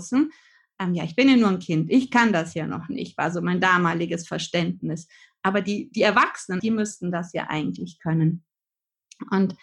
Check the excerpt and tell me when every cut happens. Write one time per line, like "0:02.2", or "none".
0:06.6